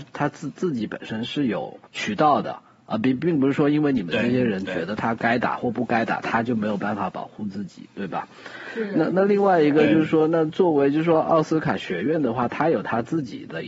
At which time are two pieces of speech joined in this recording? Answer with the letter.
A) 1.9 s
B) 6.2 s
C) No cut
A